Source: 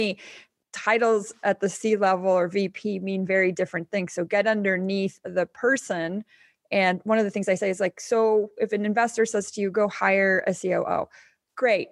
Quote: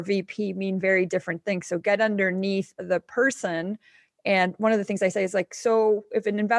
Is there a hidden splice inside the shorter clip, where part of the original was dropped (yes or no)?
no